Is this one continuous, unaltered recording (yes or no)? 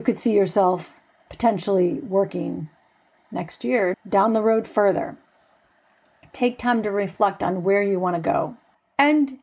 no